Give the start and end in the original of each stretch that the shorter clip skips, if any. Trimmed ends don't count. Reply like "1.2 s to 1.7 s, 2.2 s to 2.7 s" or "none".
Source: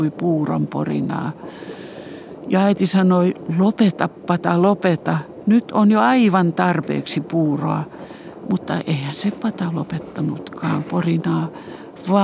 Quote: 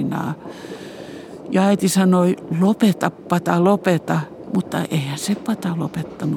5.4 s to 8.4 s